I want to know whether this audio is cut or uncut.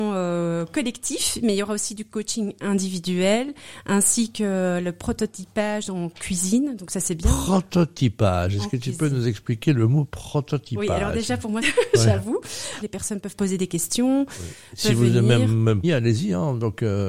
cut